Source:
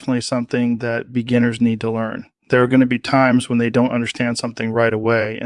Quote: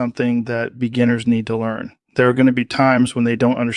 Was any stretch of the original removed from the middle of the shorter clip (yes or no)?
no